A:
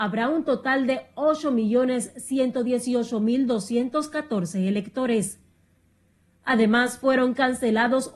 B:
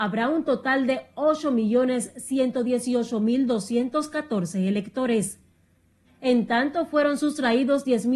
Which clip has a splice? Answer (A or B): B